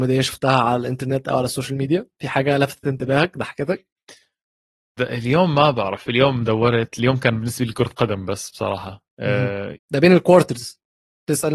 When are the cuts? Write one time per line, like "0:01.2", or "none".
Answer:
0:05.0
0:09.7